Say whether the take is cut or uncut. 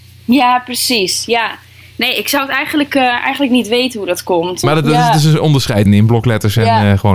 cut